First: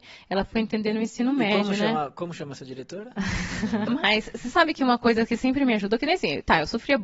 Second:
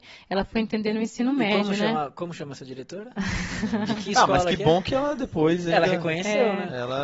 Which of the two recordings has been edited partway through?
first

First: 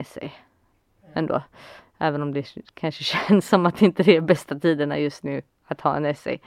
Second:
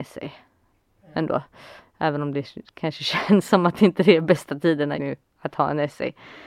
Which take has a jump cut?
second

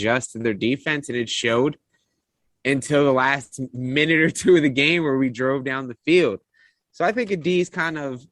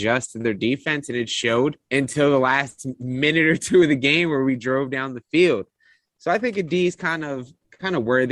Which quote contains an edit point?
second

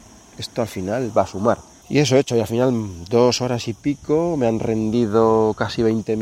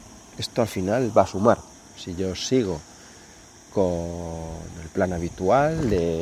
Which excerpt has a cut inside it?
first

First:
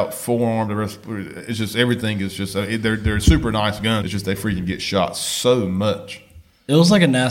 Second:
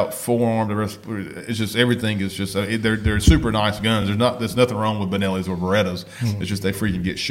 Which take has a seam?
first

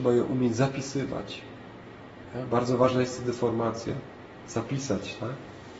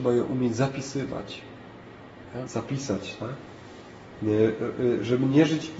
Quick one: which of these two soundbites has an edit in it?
second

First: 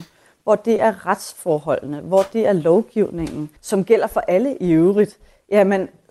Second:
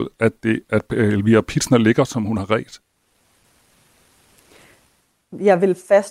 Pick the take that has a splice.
first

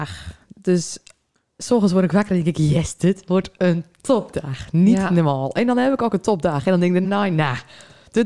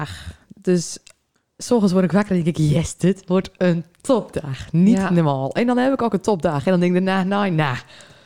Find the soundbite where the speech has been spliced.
first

